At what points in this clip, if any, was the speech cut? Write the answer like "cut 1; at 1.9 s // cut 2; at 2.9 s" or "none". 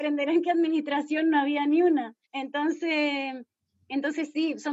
cut 1; at 2.2 s